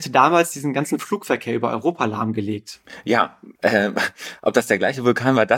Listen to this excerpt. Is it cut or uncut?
cut